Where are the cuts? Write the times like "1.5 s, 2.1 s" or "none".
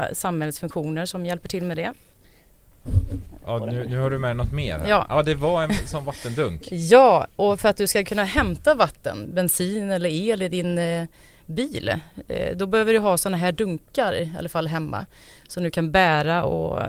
9.2 s